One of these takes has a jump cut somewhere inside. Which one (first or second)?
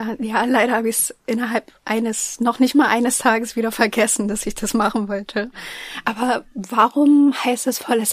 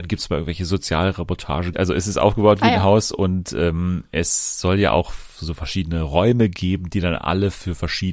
second